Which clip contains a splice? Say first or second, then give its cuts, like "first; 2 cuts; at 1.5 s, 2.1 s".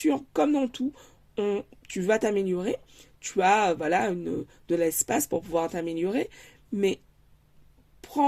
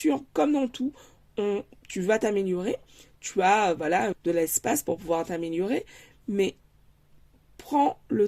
second; 1 cut; at 4.1 s